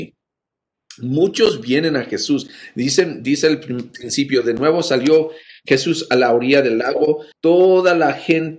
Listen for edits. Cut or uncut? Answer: cut